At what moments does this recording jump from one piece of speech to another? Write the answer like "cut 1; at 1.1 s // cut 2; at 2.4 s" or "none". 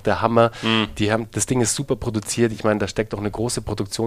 none